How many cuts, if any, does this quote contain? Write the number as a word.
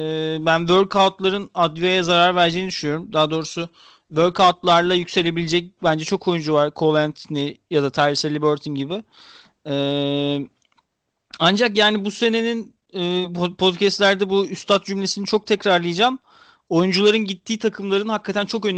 zero